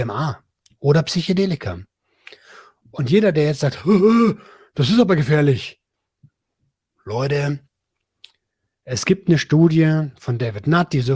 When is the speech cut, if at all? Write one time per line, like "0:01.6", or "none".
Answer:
none